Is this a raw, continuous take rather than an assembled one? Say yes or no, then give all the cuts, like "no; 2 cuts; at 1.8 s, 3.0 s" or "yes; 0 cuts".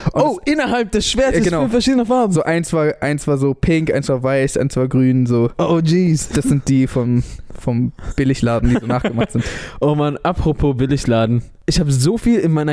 yes; 0 cuts